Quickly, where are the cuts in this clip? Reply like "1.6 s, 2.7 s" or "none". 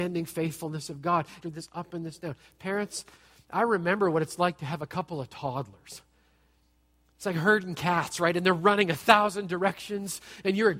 1.4 s